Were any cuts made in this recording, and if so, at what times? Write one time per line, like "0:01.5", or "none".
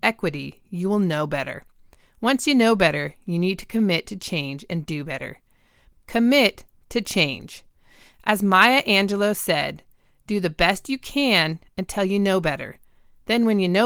0:05.9